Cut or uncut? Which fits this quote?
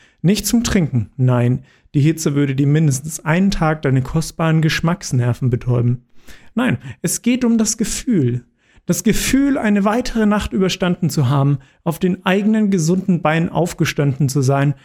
uncut